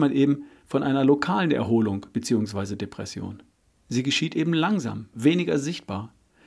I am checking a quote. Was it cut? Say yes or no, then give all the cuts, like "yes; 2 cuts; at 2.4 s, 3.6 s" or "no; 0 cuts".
yes; 2 cuts; at 3.8 s, 5.1 s